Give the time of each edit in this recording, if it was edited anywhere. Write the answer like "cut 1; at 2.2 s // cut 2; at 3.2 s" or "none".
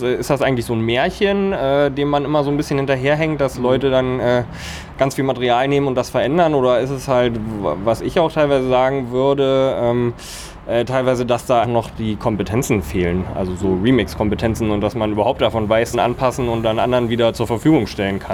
cut 1; at 11.6 s // cut 2; at 15.9 s